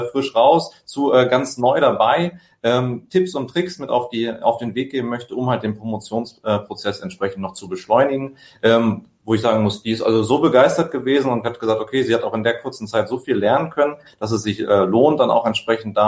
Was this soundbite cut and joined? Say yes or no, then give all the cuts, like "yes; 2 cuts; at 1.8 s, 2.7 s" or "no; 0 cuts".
no; 0 cuts